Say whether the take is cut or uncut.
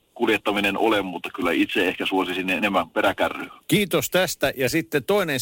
cut